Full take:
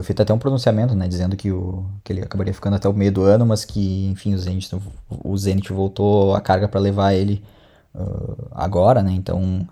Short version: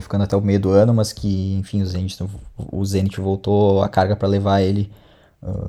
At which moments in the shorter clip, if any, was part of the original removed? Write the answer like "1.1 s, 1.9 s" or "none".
none